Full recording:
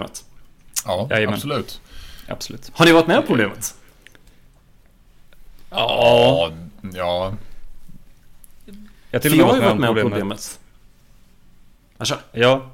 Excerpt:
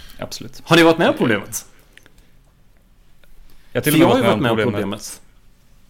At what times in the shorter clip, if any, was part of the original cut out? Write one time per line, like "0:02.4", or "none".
0:03.6